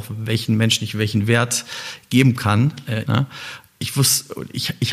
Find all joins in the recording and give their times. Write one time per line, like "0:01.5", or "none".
0:03.1